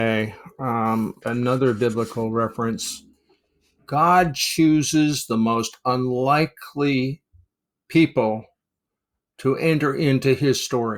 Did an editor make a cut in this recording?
yes; 2 cuts; at 1.2 s, 3.8 s

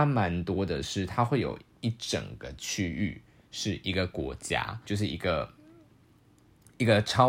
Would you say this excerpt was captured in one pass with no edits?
no; 1 cut; at 4.9 s

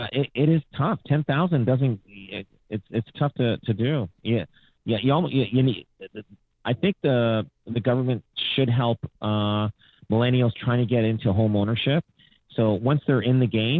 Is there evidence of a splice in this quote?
no; 0 cuts

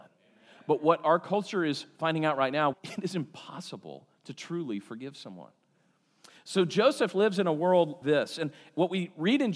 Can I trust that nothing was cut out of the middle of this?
no; 2 cuts; at 2.7 s, 8.0 s

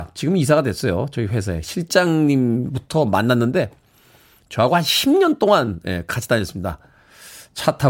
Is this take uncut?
yes; 0 cuts

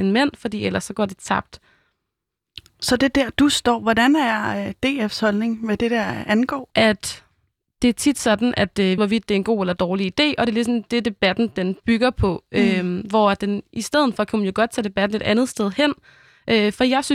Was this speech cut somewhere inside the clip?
yes; 2 cuts; at 6.7 s, 9.0 s

